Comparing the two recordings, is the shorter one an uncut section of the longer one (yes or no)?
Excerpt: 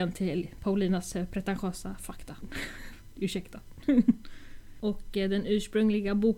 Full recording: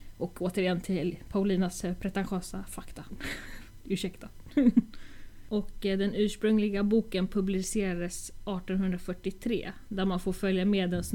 yes